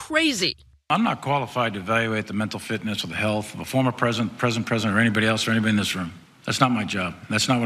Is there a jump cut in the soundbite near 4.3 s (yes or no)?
no